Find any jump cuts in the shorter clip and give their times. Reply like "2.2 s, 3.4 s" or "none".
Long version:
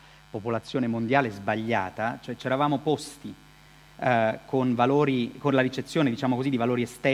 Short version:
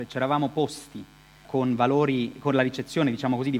1.4 s